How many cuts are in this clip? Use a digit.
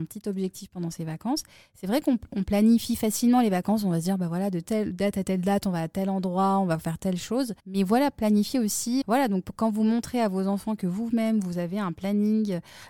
2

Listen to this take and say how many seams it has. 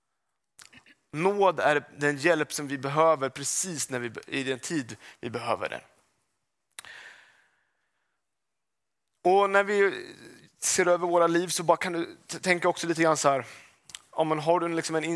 0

